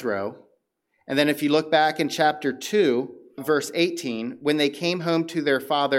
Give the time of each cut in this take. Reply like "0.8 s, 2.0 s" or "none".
3.4 s